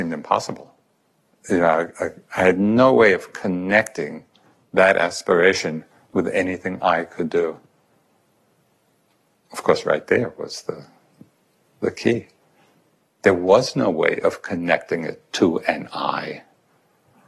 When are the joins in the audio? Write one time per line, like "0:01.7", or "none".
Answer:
none